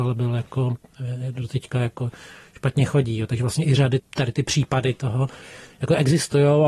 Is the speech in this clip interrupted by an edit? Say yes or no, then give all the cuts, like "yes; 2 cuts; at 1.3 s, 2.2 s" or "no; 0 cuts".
yes; 1 cut; at 4.0 s